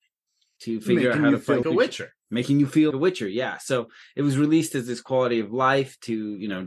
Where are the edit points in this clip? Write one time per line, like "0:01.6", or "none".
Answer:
0:01.6
0:02.9